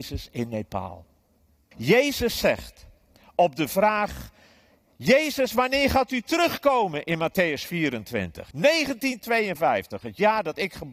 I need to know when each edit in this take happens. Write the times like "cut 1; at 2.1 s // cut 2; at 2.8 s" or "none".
cut 1; at 1.7 s // cut 2; at 8.5 s